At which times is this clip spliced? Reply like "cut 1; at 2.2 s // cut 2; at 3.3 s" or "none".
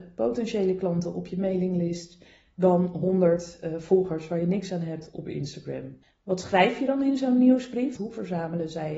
cut 1; at 6.0 s // cut 2; at 8.0 s

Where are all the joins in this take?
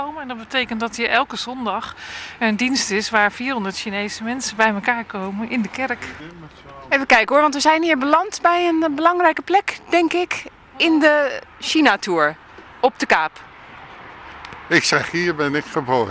none

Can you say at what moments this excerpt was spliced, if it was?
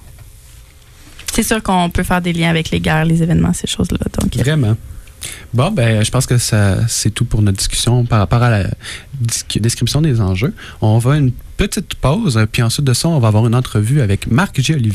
cut 1; at 9.6 s

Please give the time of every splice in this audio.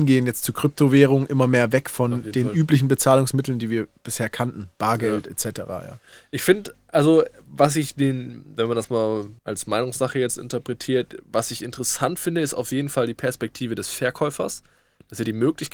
cut 1; at 9.4 s

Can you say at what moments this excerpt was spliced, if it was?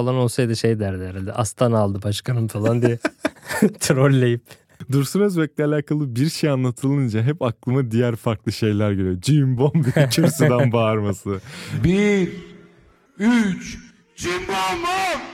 cut 1; at 9.6 s // cut 2; at 13.1 s

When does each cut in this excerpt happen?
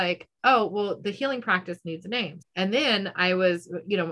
cut 1; at 2.4 s

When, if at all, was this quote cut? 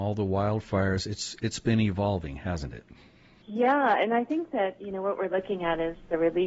none

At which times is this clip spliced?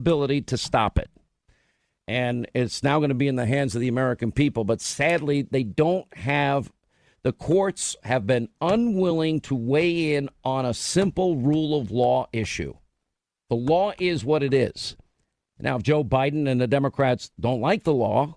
none

